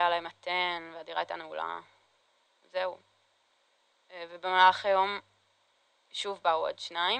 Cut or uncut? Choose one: uncut